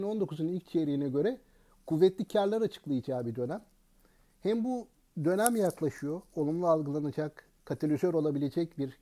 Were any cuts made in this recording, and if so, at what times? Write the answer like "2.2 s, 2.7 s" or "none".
none